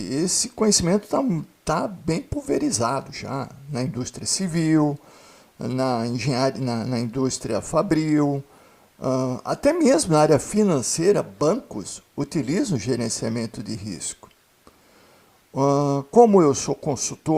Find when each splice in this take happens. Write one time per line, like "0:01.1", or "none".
none